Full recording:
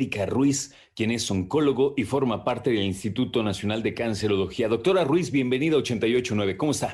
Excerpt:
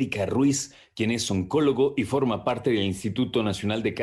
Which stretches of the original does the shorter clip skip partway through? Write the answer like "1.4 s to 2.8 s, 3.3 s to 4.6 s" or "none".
none